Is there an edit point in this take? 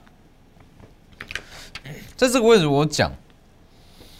no; 0 cuts

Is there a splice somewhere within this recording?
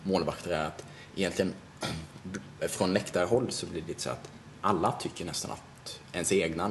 no; 0 cuts

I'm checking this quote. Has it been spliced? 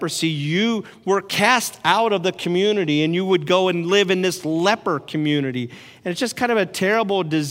no; 0 cuts

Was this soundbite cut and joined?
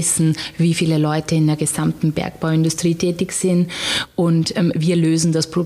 no; 0 cuts

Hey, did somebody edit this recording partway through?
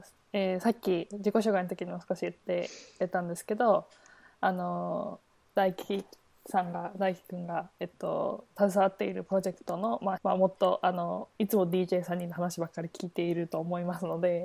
yes; 2 cuts; at 10.2 s, 11.3 s

